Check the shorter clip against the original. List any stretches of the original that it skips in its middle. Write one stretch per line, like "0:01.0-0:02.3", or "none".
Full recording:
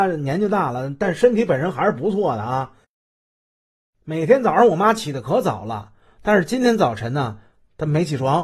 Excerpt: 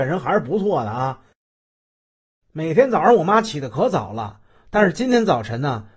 none